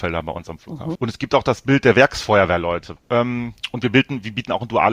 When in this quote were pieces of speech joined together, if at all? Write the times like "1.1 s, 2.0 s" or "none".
1.0 s, 3.0 s